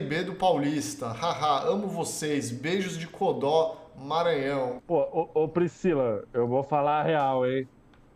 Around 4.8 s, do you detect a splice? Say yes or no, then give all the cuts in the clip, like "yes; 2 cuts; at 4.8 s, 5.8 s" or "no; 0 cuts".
yes; 1 cut; at 4.8 s